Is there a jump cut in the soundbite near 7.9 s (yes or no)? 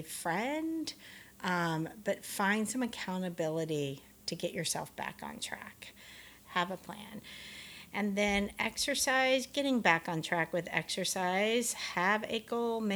no